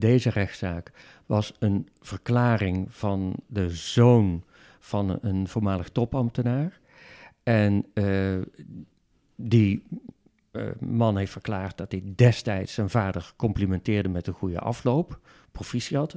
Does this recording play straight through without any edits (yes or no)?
yes